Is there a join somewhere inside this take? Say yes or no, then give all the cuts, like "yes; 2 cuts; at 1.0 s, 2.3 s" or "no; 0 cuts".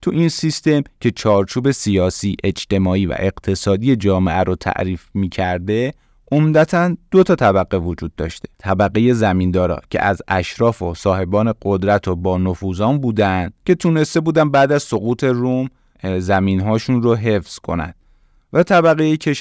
no; 0 cuts